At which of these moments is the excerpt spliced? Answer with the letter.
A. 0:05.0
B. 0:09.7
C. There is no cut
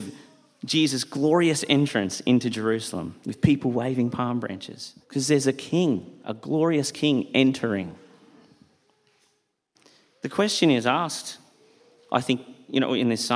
A